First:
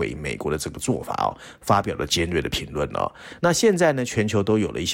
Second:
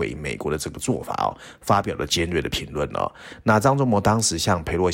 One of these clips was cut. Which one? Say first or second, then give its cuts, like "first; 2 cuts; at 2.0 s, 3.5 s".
first; 1 cut; at 3.4 s